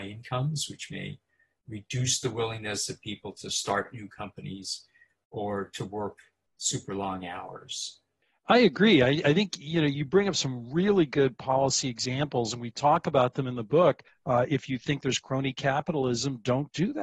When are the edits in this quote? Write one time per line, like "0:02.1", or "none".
0:14.1